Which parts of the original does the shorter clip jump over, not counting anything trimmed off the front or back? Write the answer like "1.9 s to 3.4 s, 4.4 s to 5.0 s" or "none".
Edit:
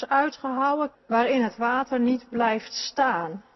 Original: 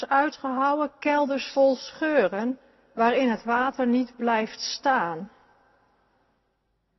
0.9 s to 2.8 s